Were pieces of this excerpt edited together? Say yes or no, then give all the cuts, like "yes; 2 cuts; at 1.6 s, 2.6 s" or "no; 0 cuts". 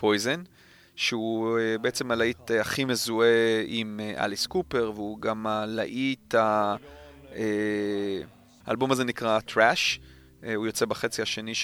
yes; 1 cut; at 8.6 s